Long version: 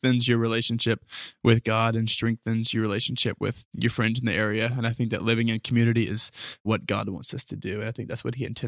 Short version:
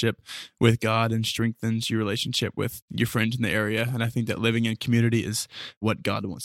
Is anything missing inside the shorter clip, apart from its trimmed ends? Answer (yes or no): no